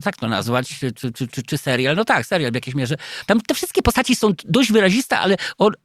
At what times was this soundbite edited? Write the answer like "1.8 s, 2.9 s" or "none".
1.3 s, 3.3 s